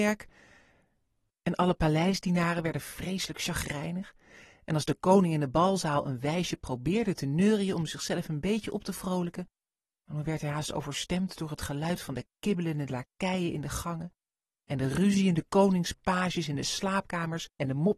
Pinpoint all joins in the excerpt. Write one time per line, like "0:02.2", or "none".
0:01.3